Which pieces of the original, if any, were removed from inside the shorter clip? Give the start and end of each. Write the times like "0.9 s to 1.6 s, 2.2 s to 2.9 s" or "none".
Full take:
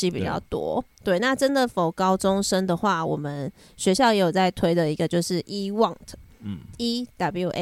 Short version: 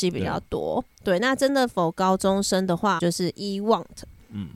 3.0 s to 5.1 s